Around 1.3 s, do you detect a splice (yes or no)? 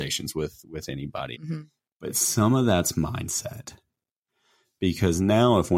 yes